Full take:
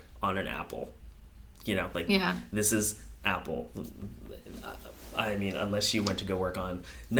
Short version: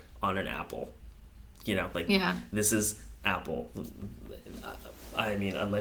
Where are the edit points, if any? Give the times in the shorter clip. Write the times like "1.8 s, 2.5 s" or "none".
none